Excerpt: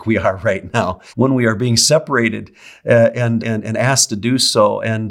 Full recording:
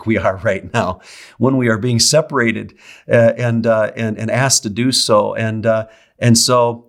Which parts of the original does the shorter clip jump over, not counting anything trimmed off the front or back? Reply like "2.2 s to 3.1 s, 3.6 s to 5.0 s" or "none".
1.1 s to 1.3 s, 3.6 s to 3.9 s